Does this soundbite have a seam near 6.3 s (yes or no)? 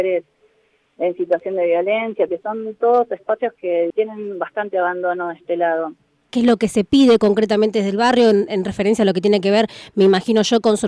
yes